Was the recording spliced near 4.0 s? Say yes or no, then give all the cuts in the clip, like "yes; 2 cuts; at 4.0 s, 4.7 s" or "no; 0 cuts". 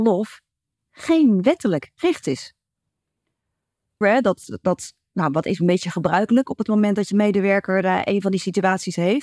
yes; 1 cut; at 4.0 s